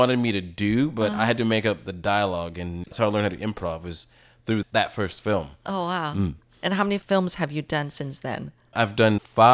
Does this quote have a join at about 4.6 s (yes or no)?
yes